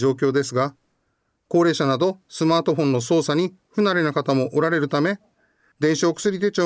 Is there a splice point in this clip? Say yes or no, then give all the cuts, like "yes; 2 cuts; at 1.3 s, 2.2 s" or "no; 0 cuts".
yes; 1 cut; at 5.7 s